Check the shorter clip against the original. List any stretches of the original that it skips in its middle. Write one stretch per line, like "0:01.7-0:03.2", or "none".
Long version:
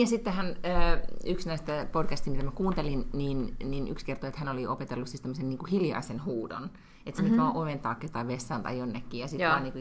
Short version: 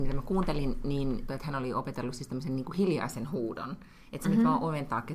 0:03.6-0:04.2